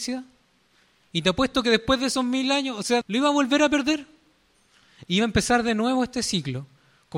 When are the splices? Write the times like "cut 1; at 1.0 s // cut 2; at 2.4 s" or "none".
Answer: cut 1; at 3.0 s